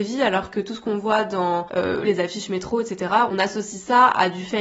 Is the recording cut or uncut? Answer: cut